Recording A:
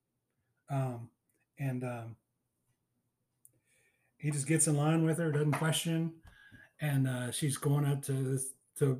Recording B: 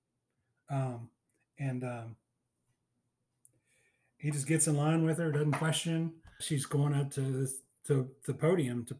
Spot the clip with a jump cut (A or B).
B